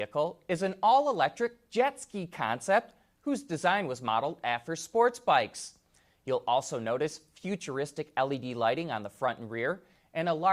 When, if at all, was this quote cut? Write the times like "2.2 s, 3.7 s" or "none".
none